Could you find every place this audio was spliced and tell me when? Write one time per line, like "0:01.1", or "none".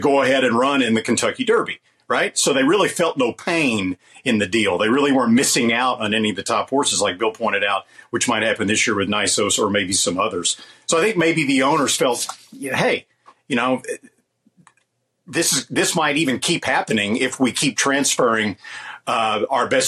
none